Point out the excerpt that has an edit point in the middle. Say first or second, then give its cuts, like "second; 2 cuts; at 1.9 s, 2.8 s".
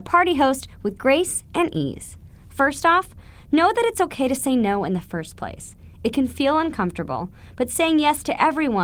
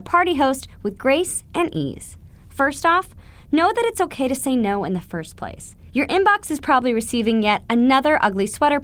second; 1 cut; at 5.9 s